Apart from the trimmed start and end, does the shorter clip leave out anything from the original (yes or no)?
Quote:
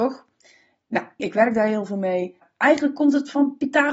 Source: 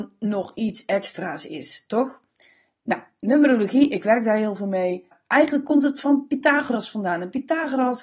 yes